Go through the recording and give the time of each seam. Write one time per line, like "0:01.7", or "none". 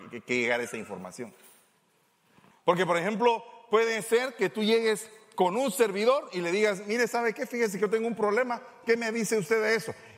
0:02.5